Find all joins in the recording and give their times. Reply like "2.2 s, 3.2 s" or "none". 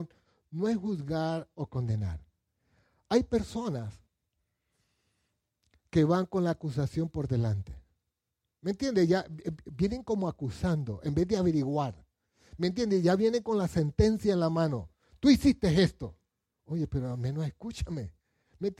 none